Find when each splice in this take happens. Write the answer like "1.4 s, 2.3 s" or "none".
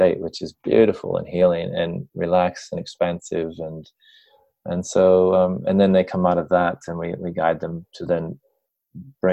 none